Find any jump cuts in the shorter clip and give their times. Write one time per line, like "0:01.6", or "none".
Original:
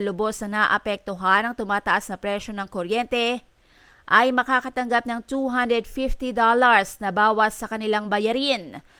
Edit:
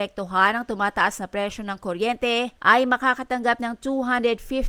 0:02.6

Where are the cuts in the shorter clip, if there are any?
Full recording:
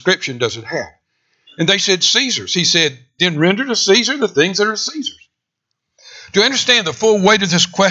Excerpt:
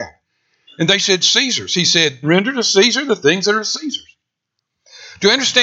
0:02.2

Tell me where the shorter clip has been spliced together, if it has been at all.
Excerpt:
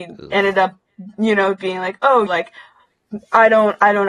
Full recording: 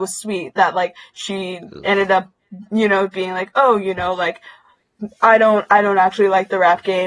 0:02.3

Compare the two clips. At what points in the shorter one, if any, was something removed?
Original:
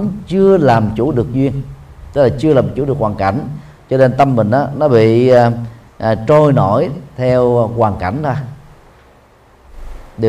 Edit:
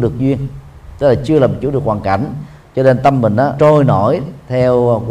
0:03.6

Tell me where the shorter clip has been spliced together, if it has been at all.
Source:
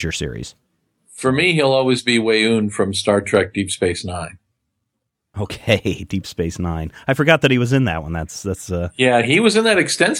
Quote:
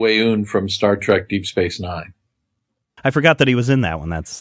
0:03.0

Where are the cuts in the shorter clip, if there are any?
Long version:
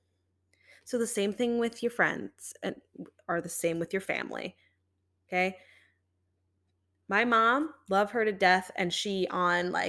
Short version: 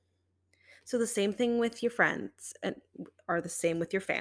none

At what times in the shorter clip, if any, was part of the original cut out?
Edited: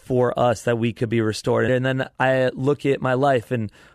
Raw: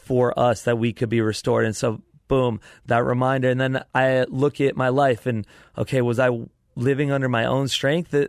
0:01.7

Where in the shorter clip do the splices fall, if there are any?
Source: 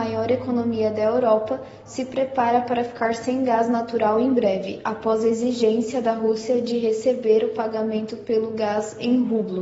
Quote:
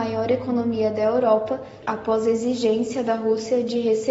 0:01.8

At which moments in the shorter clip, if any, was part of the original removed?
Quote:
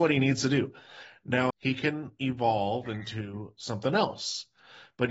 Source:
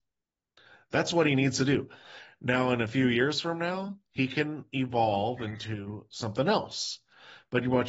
0:01.5

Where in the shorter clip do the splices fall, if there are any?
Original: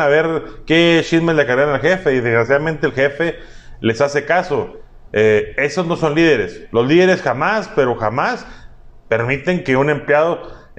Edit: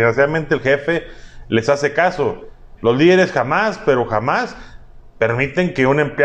0:02.8

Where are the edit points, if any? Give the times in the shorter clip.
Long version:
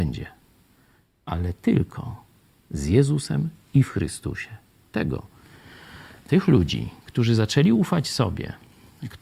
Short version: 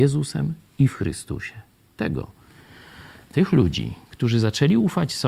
none

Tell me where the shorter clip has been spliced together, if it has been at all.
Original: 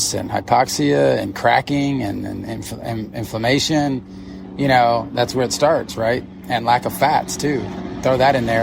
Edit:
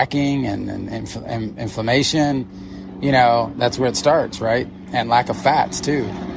none

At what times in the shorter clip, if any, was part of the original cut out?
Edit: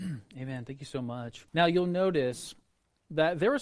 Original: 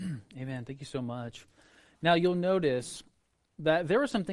0:01.5

